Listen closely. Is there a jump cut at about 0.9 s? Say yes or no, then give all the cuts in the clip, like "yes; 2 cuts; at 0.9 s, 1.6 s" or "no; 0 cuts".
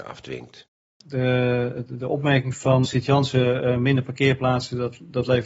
no; 1 cut; at 2.8 s